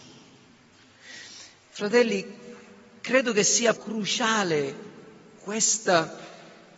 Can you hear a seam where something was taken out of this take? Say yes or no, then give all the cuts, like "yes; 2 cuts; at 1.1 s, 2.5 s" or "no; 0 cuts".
yes; 1 cut; at 3.8 s